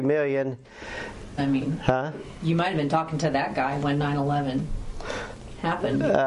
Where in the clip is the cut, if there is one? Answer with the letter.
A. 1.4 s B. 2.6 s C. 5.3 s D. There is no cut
A